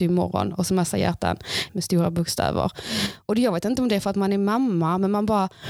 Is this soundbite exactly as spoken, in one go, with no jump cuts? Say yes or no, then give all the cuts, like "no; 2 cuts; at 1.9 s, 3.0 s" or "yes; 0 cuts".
no; 1 cut; at 1.7 s